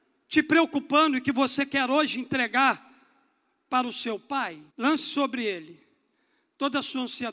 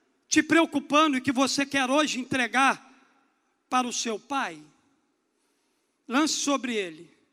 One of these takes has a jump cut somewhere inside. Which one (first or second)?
first